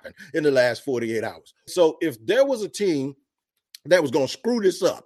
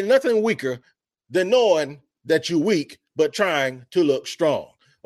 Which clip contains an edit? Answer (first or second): first